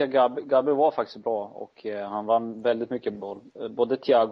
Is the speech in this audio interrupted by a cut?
no; 0 cuts

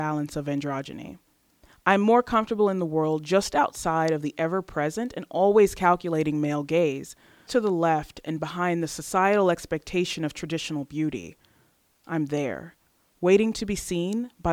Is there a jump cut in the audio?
yes; 1 cut; at 7.5 s

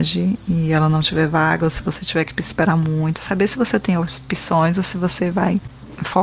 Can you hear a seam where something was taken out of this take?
no; 0 cuts

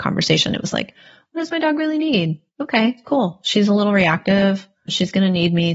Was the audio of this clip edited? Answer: yes; 1 cut; at 2.5 s

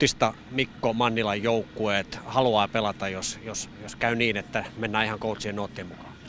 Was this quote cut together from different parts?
no; 0 cuts

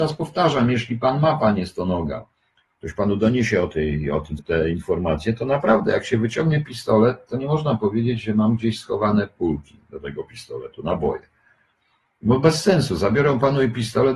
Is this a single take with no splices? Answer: no; 1 cut; at 4.4 s

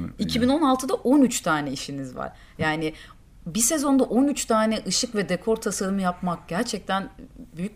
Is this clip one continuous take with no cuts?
yes; 0 cuts

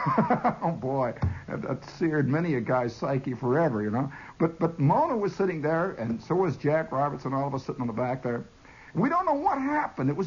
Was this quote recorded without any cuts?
yes; 0 cuts

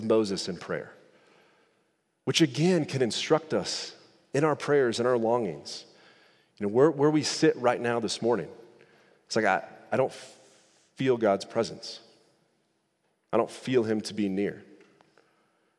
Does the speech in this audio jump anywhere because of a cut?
no; 0 cuts

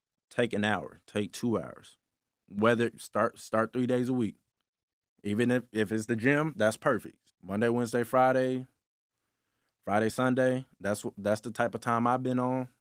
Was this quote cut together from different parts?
yes; 2 cuts; at 7.3 s, 10.1 s

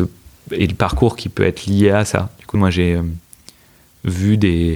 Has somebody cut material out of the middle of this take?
yes; 1 cut; at 2.5 s

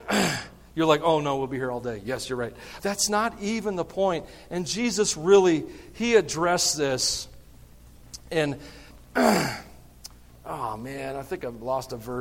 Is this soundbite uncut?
no; 2 cuts; at 2.8 s, 8.9 s

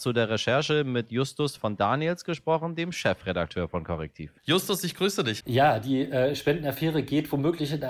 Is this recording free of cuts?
no; 2 cuts; at 4.4 s, 5.4 s

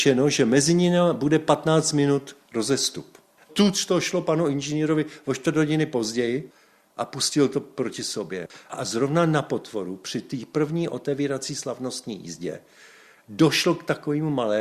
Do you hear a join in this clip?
yes; 1 cut; at 3.5 s

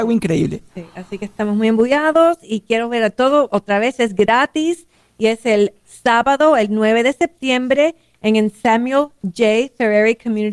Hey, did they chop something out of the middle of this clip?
yes; 1 cut; at 3.5 s

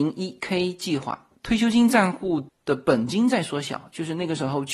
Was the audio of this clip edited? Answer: yes; 1 cut; at 1.3 s

